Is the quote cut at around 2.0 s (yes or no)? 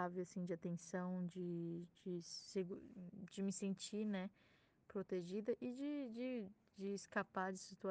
no